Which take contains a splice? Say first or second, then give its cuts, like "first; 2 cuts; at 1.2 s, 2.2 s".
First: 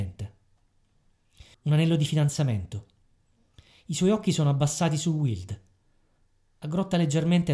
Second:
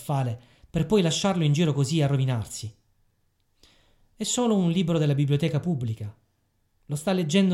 first; 1 cut; at 1.5 s